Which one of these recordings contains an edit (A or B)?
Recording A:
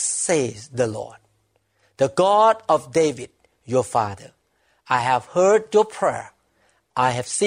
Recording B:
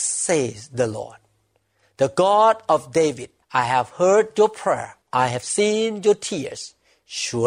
B